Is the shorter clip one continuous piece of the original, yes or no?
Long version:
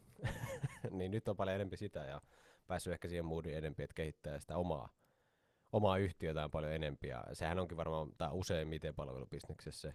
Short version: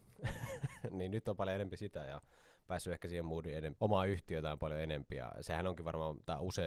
no